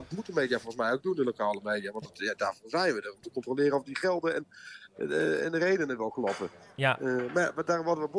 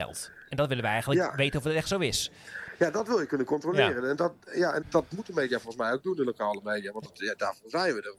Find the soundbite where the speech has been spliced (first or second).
second